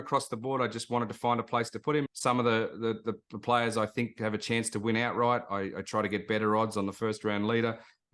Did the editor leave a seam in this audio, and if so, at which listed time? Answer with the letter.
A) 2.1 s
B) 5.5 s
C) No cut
A